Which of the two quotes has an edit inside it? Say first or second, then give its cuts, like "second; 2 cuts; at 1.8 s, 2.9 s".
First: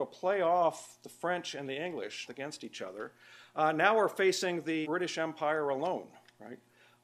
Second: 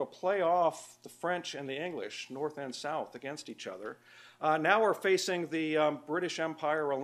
first; 2 cuts; at 2.3 s, 4.8 s